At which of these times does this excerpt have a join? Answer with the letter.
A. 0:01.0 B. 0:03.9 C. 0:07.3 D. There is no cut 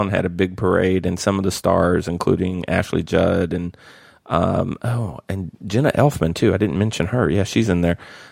D